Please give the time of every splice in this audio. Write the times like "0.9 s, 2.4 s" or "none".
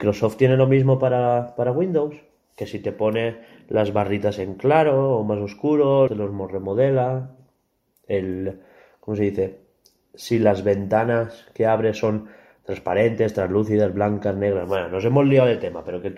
6.1 s